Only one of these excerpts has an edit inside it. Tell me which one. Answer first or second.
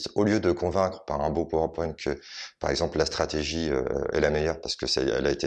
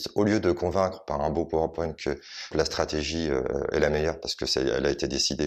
second